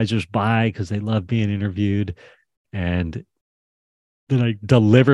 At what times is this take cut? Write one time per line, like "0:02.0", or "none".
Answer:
none